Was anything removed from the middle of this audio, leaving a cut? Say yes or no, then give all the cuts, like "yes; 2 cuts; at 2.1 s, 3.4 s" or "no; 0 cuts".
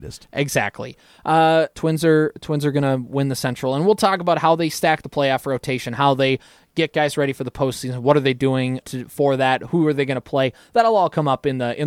yes; 2 cuts; at 1.7 s, 8.8 s